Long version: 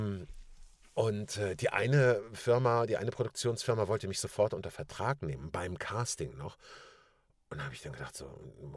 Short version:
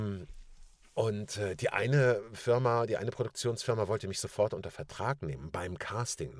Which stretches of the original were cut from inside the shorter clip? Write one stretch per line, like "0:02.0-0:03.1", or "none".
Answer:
none